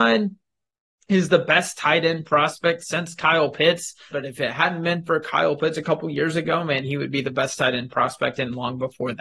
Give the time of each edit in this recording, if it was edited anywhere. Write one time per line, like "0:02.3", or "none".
0:04.1
0:05.7